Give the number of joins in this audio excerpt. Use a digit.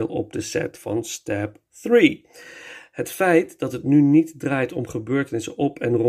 1